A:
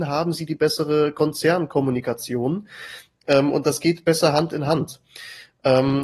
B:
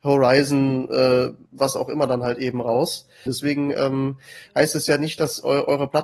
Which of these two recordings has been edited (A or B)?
B